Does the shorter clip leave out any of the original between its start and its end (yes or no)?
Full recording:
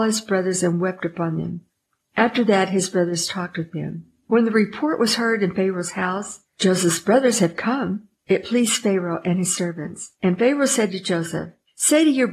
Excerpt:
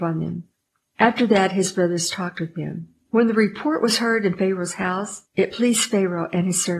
yes